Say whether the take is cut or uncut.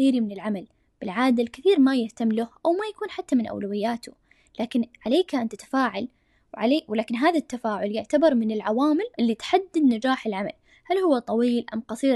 cut